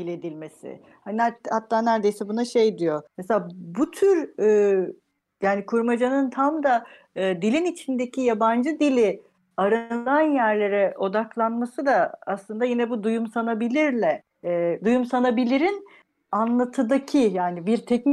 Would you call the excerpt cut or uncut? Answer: cut